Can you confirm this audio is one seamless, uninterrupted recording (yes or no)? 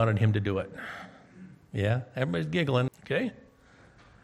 no